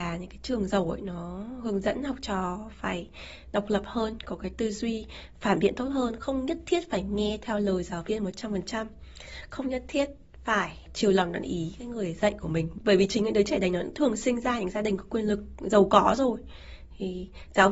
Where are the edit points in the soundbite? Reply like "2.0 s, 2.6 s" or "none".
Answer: none